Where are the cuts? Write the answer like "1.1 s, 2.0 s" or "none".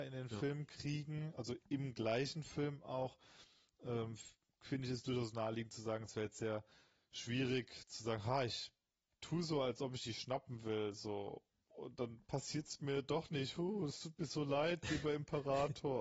none